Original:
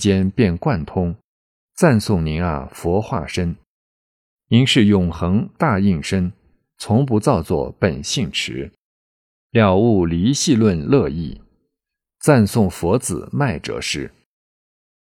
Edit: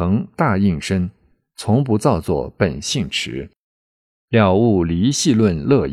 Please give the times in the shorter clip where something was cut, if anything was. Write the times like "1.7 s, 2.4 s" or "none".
none